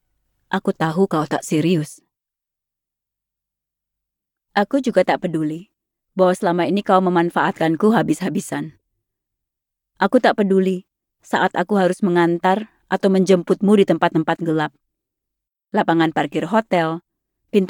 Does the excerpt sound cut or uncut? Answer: uncut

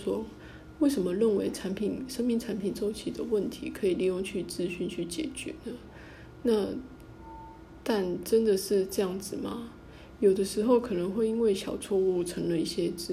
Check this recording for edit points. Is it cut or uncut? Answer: uncut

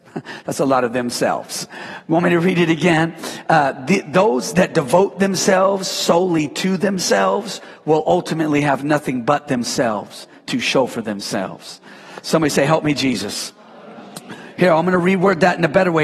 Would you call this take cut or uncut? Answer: uncut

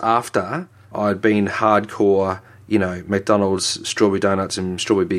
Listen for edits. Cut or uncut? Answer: cut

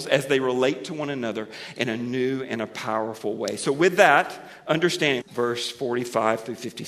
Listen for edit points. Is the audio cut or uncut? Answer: cut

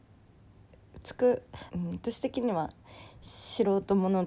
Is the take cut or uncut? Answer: cut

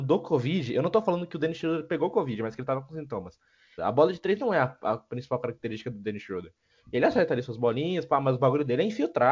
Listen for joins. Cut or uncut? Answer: cut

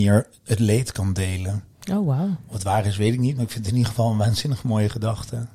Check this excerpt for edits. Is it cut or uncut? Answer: uncut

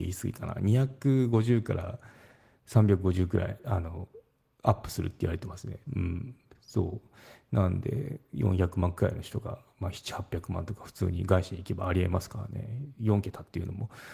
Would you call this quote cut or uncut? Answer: cut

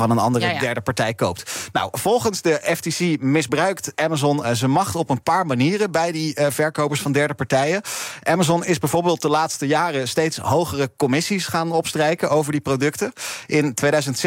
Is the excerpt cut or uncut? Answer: uncut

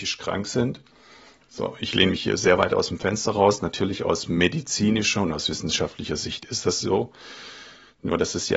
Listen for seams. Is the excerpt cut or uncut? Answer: uncut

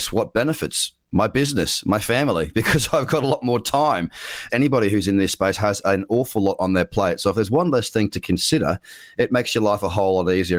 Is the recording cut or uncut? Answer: cut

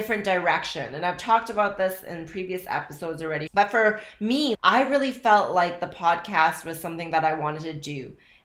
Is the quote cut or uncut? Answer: cut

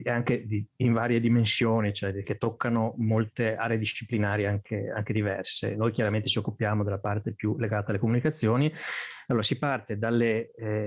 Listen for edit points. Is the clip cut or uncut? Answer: cut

